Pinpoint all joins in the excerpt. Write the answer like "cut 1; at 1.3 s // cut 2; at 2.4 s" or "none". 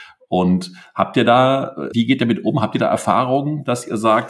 cut 1; at 1.9 s

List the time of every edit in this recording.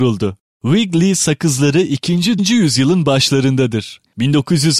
cut 1; at 2.4 s

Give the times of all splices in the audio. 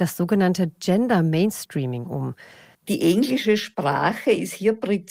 cut 1; at 2.7 s

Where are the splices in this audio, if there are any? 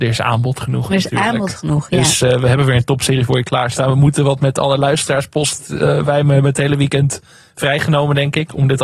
none

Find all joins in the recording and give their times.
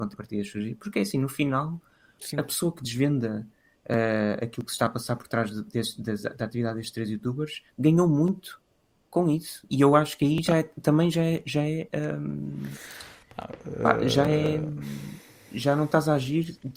none

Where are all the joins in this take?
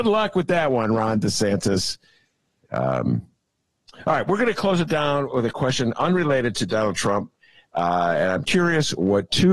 cut 1; at 8.4 s

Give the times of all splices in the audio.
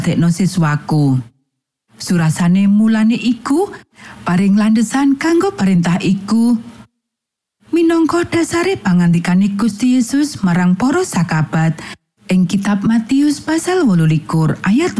none

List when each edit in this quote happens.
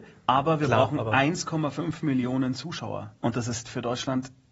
cut 1; at 3.2 s

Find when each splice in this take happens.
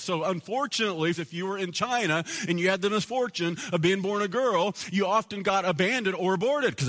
cut 1; at 1.1 s

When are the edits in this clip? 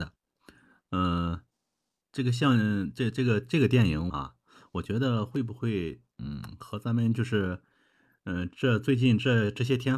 cut 1; at 4.1 s

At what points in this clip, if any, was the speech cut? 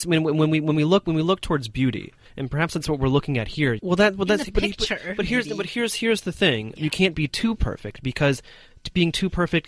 cut 1; at 2.3 s // cut 2; at 3.8 s // cut 3; at 6.8 s

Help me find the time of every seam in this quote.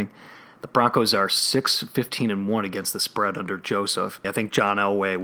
cut 1; at 4.2 s

